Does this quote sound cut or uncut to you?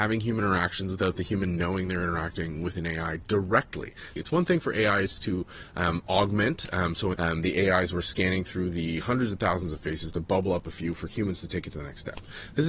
cut